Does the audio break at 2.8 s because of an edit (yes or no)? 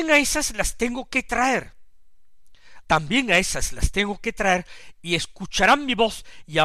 yes